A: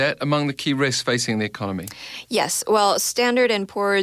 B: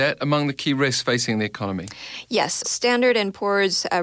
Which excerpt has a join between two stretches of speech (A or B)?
B